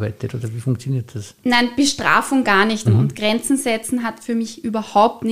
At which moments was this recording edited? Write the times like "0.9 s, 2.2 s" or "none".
2.9 s